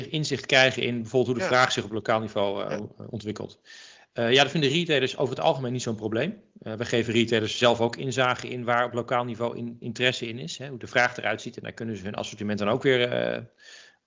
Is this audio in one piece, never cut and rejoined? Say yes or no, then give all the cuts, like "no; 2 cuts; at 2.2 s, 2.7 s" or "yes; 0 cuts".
yes; 0 cuts